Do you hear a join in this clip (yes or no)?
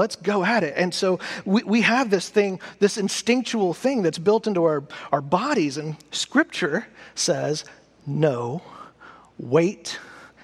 no